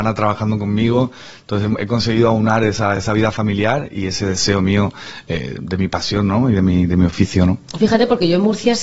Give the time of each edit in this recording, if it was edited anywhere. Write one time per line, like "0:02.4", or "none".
none